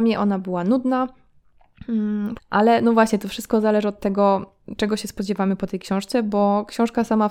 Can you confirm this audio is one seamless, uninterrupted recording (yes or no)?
no